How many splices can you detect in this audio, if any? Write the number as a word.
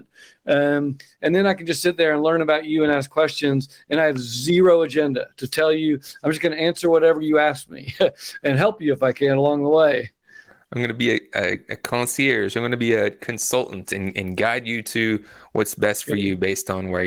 zero